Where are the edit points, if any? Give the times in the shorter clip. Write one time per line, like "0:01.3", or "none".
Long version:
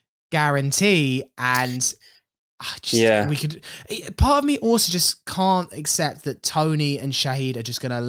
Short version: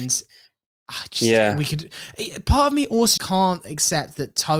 0:03.2

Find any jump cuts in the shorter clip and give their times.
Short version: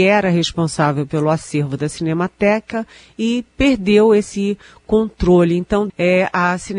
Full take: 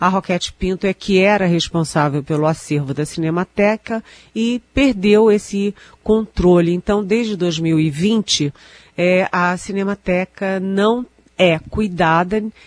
0:05.9

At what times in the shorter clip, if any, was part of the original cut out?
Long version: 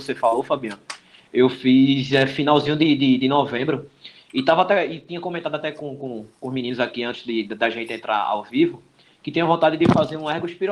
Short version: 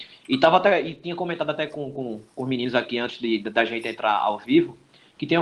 none

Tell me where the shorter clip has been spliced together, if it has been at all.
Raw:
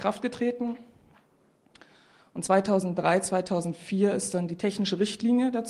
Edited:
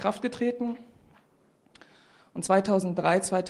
none

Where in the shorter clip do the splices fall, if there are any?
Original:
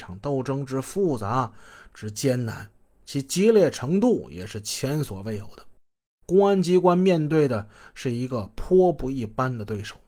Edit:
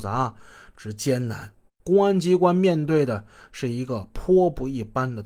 0:01.7

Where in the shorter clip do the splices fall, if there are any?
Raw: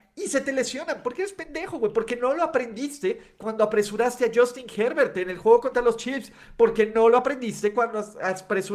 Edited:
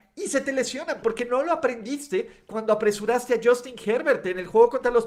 0:01.0

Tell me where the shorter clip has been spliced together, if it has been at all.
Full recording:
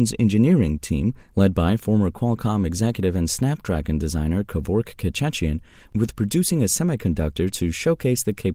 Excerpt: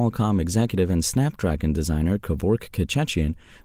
none

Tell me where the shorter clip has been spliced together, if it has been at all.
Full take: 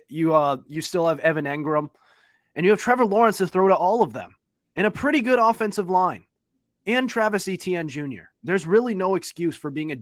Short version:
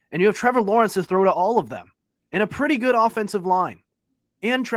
none

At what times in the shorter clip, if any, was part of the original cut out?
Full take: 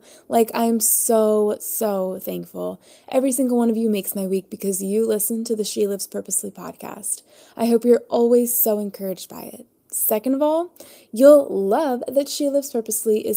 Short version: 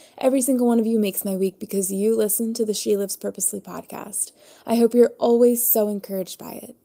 none

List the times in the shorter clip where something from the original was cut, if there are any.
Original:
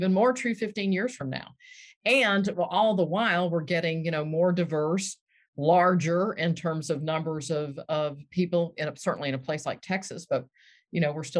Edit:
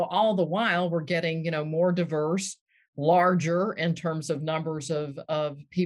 none

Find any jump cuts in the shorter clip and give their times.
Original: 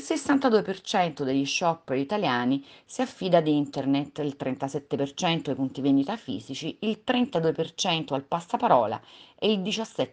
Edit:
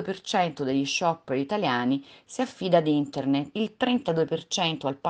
0:03.5

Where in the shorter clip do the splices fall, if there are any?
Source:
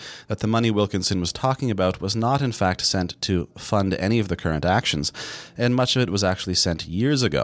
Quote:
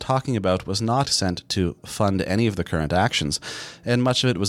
0:01.0

